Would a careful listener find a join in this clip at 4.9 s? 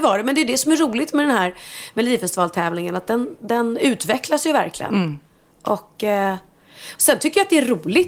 no; 0 cuts

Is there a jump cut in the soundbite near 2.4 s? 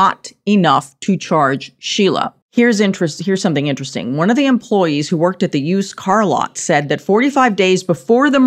yes; 1 cut; at 2.4 s

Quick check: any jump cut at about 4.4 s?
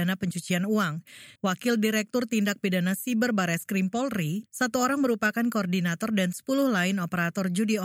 yes; 2 cuts; at 1.4 s, 4.4 s

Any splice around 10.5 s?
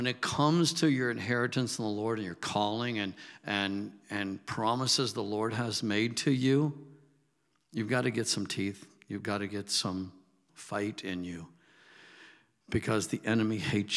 yes; 1 cut; at 10.5 s

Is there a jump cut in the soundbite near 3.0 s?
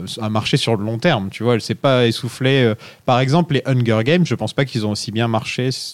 no; 0 cuts

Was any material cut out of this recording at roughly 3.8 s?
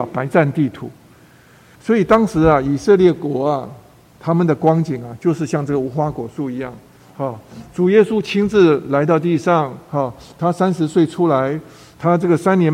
no; 1 cut; at 1.7 s

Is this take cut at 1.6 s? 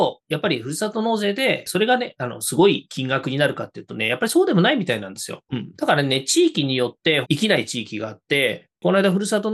no; 2 cuts; at 5.5 s, 7.2 s

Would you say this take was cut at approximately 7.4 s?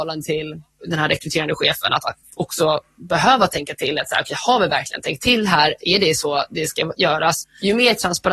yes; 1 cut; at 7.4 s

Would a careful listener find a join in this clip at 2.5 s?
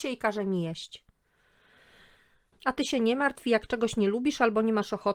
yes; 1 cut; at 2.5 s

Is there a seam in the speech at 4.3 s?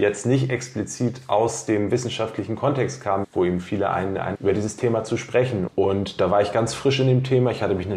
yes; 3 cuts; at 3.2 s, 4.3 s, 5.7 s

